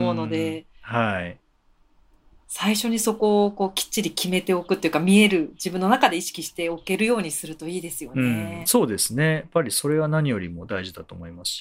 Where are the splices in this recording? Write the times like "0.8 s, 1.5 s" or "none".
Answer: none